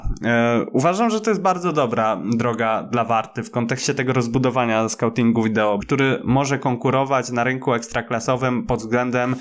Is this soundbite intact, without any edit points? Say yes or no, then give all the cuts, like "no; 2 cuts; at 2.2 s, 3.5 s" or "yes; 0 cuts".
no; 1 cut; at 5.8 s